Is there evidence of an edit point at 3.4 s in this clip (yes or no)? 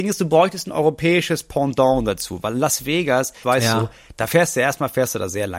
yes